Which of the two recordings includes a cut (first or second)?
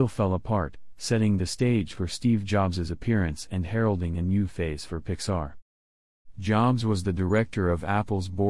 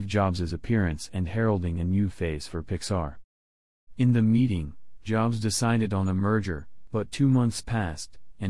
second